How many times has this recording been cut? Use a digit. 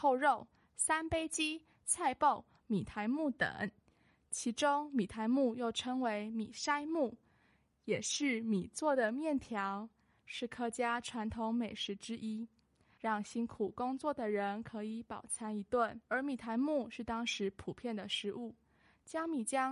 2